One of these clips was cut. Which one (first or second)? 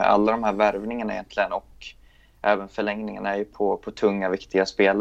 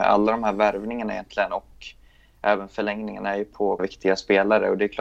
second